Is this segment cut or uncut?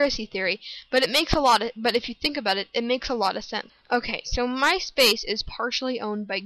cut